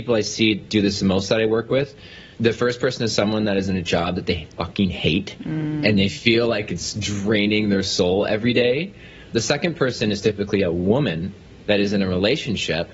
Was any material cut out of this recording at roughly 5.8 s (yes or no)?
no